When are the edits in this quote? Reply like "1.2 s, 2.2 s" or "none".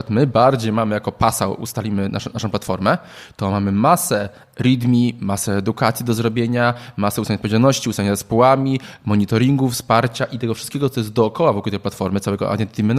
none